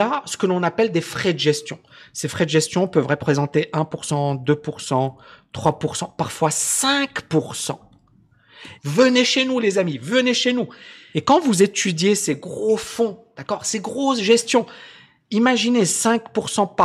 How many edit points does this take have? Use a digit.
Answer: 2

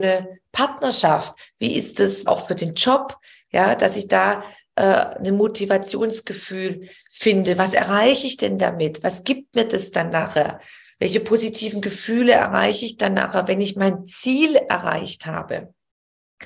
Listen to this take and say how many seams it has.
1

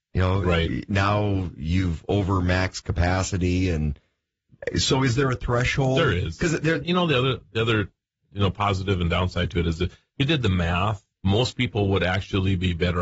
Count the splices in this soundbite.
2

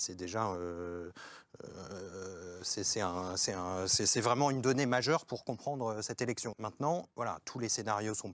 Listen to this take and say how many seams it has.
1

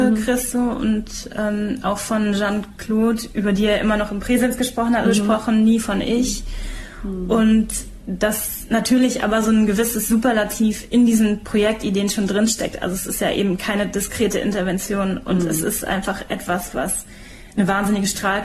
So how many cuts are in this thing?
1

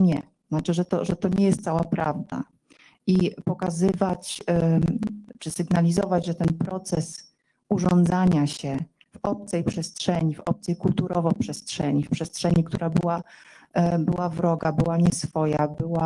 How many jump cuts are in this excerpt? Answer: 0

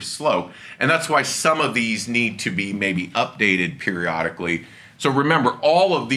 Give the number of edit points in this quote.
1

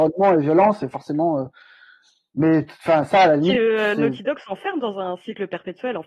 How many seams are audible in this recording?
0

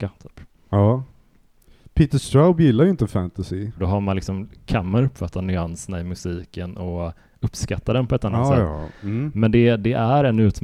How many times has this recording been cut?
1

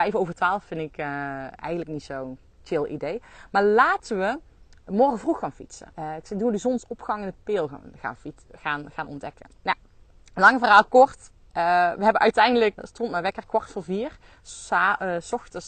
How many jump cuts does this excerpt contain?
2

